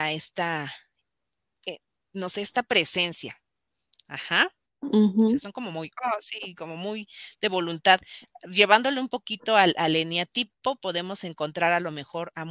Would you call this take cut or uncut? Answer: uncut